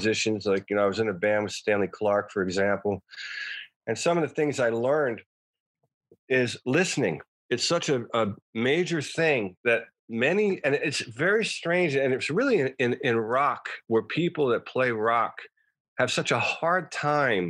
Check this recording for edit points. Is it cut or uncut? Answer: uncut